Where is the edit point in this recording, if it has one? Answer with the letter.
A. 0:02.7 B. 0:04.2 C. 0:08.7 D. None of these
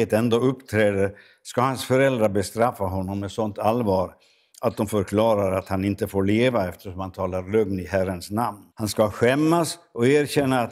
C